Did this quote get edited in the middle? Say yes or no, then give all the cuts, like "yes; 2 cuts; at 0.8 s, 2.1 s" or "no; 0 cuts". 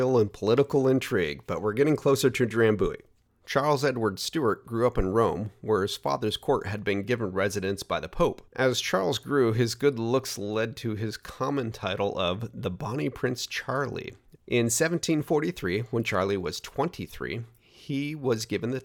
yes; 2 cuts; at 8.5 s, 14.4 s